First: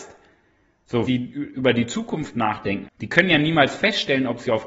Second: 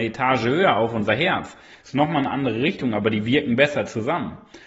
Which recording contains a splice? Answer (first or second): first